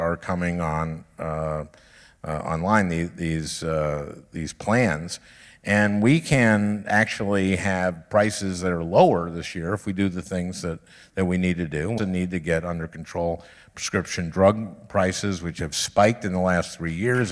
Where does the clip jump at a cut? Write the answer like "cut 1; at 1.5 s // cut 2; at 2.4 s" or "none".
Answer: cut 1; at 12.0 s